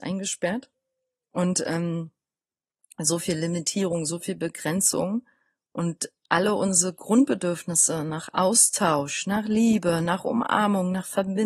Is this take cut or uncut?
uncut